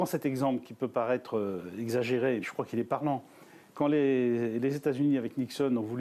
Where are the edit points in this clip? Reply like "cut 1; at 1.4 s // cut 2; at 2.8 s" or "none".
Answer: cut 1; at 2.4 s